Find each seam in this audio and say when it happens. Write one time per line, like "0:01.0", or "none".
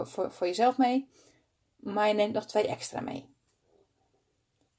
none